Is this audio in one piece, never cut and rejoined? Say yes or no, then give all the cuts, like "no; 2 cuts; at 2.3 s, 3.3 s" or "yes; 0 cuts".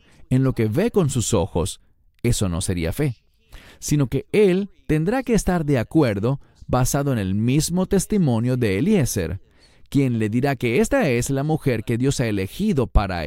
yes; 0 cuts